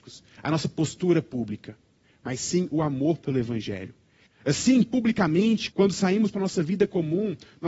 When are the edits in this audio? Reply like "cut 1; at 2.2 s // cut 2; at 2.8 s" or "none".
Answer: cut 1; at 4.3 s // cut 2; at 5.7 s